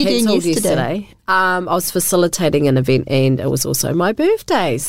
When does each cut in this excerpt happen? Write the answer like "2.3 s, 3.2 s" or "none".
none